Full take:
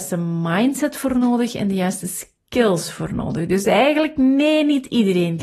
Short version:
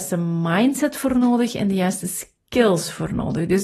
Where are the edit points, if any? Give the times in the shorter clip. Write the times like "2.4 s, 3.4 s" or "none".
none